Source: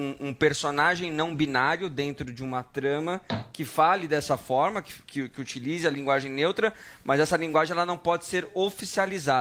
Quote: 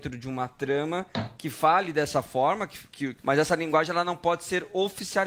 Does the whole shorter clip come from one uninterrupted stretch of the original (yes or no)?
no